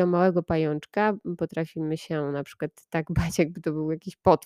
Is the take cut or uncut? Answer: uncut